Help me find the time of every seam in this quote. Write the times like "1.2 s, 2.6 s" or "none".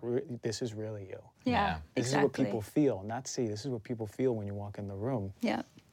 none